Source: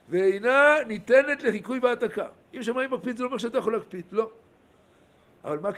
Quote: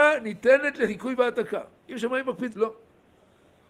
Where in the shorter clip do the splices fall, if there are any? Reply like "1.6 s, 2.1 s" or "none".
2.5 s